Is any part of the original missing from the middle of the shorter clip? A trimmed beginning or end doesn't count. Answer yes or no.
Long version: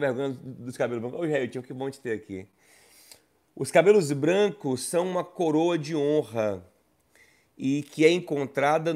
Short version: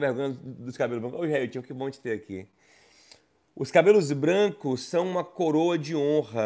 no